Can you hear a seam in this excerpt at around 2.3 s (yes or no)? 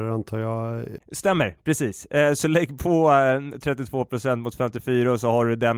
no